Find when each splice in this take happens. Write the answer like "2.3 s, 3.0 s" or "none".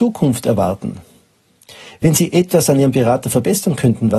none